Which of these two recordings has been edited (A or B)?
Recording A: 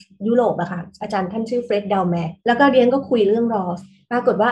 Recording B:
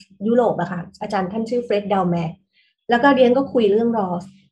A